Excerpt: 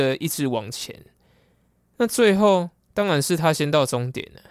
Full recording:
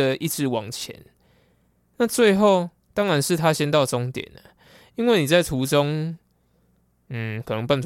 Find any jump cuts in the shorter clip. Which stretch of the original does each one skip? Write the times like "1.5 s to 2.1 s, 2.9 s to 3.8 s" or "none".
none